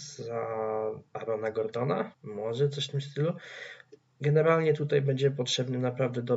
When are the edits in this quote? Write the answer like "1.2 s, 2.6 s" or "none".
2.1 s